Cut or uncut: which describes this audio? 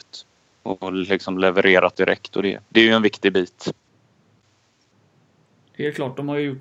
uncut